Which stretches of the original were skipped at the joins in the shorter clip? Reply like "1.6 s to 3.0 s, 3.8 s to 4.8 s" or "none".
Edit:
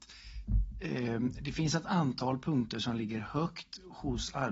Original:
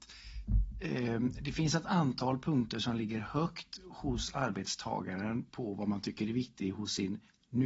none